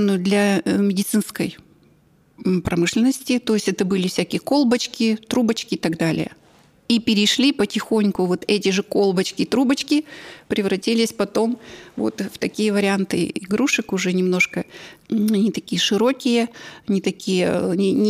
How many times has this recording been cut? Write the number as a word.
one